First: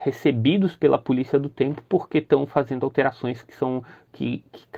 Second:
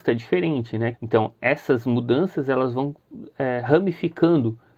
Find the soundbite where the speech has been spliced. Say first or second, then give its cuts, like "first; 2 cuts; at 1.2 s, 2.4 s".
second; 1 cut; at 0.9 s